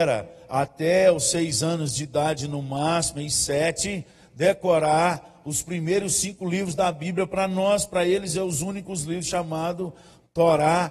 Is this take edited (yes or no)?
no